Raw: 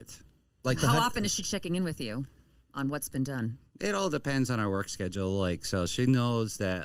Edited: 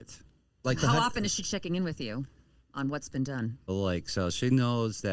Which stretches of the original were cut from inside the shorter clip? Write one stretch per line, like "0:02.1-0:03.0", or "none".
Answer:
0:03.7-0:05.2